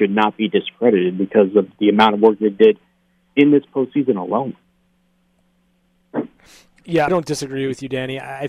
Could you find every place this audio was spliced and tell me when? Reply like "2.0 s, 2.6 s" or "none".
7.1 s